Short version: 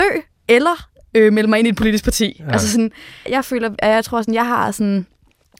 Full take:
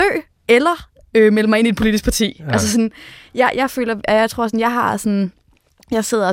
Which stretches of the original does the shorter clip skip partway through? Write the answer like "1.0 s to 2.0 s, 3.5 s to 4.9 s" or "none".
3.3 s to 3.5 s